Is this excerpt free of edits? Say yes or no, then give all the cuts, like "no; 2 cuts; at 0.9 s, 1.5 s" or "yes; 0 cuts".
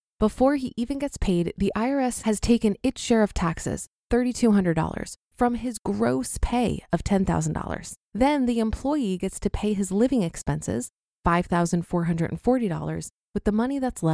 no; 1 cut; at 8.0 s